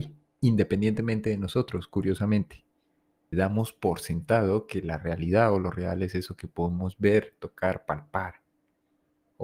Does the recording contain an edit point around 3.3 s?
yes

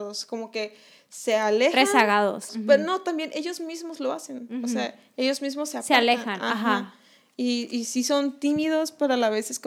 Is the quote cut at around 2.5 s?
yes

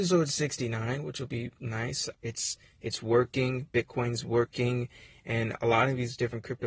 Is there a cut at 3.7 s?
no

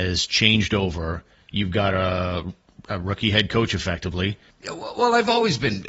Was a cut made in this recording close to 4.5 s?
yes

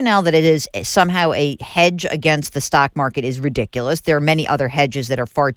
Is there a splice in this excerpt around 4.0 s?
no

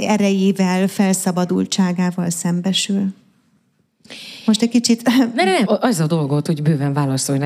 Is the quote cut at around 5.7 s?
yes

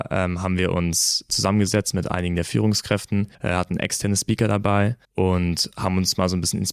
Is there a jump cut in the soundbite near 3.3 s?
yes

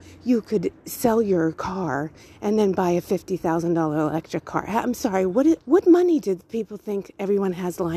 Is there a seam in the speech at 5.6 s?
yes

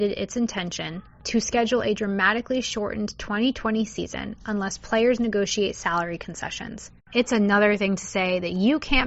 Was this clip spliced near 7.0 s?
yes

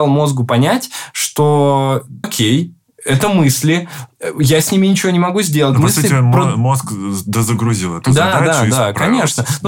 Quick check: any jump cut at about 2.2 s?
yes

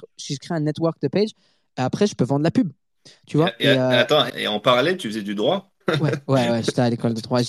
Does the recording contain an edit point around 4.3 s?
yes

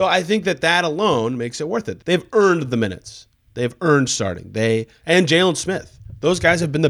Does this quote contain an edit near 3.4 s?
no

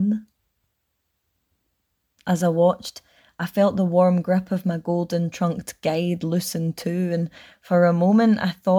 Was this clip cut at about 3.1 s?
no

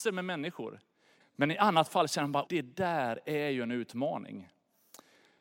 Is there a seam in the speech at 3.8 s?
no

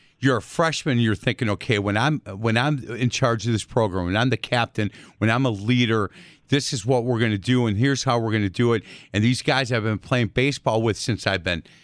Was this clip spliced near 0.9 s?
no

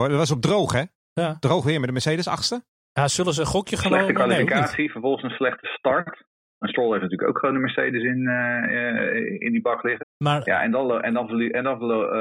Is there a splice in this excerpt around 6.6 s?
yes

